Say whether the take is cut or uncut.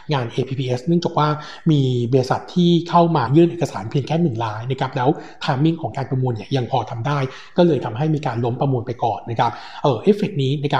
cut